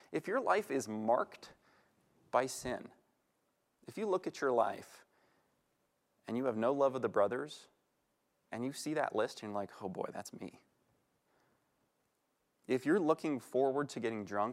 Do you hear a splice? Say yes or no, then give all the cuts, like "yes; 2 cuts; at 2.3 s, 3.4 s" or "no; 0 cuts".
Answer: no; 0 cuts